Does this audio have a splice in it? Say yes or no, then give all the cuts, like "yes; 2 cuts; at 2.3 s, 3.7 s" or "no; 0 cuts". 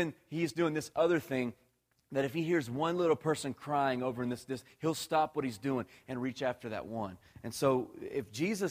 no; 0 cuts